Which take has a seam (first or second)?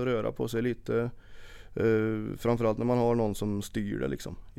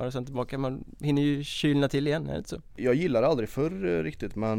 second